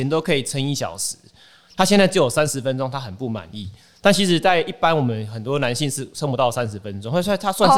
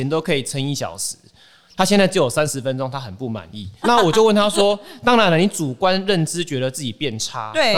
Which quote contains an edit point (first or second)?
second